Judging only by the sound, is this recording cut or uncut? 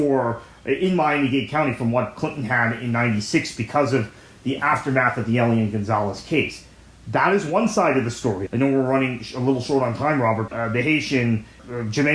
cut